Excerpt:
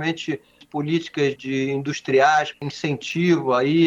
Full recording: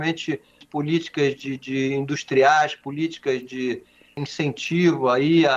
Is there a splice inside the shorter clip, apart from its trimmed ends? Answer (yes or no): yes